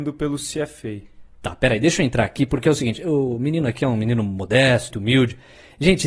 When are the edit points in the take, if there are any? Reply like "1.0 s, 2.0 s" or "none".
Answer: 4.9 s